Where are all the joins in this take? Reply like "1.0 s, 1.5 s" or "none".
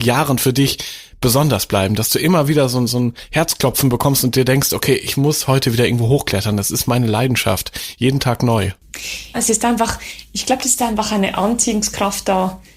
9.3 s